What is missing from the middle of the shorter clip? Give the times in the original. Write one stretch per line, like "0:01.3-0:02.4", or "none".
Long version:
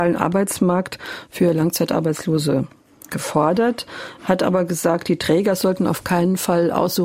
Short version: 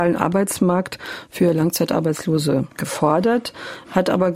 0:02.7-0:03.1